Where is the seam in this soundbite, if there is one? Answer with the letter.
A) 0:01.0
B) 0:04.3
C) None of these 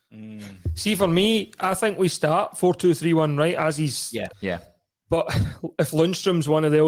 B